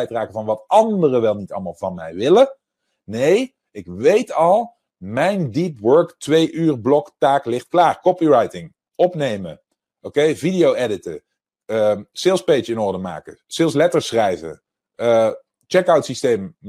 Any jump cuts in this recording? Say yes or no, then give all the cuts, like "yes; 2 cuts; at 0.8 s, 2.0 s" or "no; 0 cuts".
no; 0 cuts